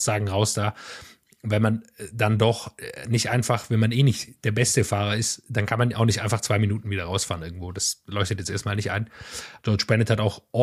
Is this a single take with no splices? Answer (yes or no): no